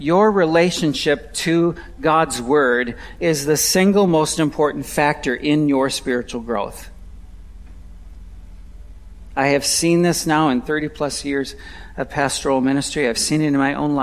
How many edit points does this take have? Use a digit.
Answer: 1